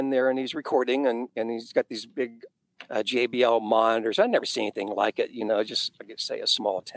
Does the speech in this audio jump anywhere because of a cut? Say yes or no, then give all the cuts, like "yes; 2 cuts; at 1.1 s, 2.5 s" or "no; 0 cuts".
no; 0 cuts